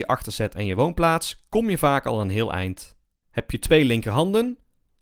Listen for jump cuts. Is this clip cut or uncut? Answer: cut